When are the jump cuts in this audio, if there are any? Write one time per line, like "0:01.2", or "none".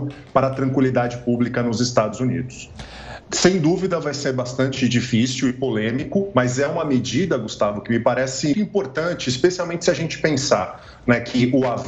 0:03.2
0:08.5